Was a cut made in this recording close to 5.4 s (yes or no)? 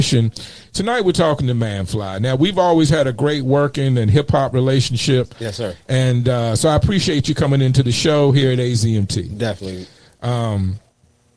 no